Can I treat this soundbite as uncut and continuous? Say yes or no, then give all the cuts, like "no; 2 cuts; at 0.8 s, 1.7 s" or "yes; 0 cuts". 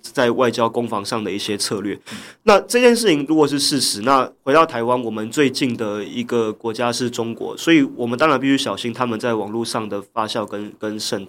yes; 0 cuts